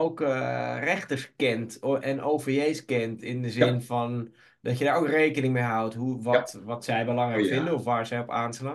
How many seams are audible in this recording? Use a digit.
0